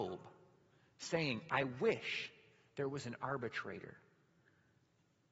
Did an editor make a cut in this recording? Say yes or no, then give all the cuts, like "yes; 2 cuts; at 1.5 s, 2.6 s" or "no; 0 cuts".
no; 0 cuts